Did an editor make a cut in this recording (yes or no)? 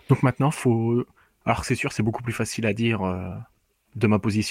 no